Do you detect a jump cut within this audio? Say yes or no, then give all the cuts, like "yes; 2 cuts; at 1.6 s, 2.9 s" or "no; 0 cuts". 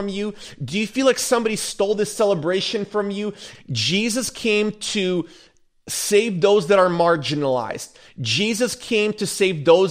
yes; 1 cut; at 3.5 s